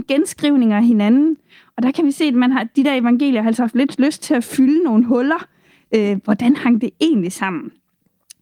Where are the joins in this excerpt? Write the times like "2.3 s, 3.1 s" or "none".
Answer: none